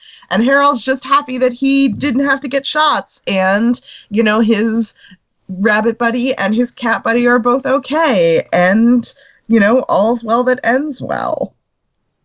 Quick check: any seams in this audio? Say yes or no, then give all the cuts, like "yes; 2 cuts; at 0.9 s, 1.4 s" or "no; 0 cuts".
no; 0 cuts